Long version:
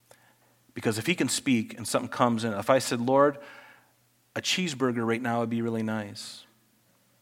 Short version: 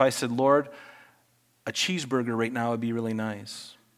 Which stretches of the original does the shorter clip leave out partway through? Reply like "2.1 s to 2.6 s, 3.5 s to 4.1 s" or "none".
none